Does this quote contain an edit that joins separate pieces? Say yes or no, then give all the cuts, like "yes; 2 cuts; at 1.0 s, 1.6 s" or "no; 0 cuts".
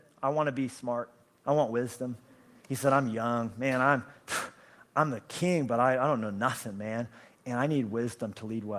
no; 0 cuts